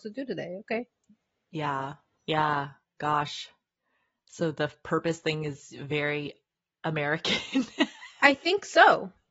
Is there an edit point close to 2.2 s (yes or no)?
yes